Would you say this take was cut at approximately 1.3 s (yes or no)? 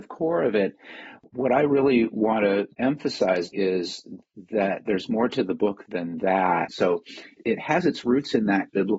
no